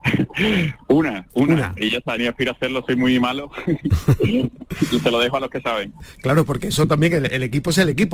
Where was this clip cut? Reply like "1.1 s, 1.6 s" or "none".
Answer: 2.2 s